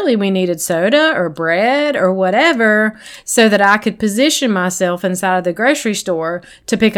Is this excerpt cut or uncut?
uncut